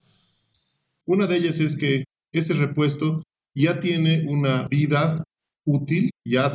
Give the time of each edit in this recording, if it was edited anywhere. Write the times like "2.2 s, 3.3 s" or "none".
1.0 s